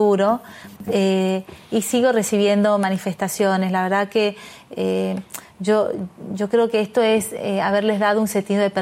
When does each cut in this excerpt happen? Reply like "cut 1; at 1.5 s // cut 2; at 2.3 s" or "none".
none